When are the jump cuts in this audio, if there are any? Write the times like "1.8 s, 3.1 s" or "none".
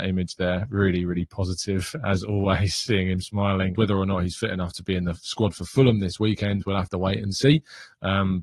3.7 s